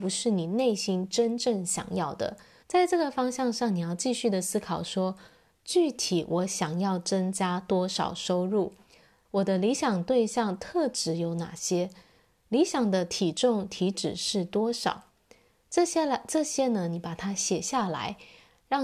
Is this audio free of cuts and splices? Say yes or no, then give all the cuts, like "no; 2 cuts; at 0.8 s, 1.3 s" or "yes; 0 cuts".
no; 2 cuts; at 2.6 s, 9.2 s